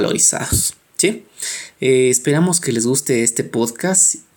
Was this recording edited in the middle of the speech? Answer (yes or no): no